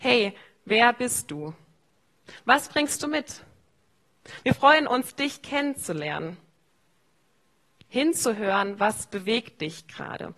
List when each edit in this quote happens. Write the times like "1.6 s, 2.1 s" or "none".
none